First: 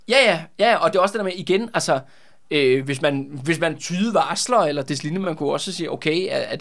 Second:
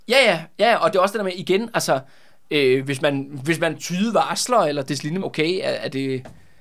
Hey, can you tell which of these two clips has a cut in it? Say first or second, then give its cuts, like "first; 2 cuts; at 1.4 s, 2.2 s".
second; 1 cut; at 5.2 s